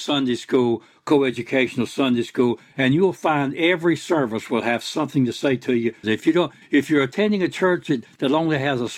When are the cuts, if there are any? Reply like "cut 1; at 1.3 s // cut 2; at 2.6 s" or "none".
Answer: cut 1; at 6.0 s